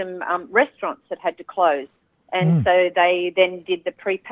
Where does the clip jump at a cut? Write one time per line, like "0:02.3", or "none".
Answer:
none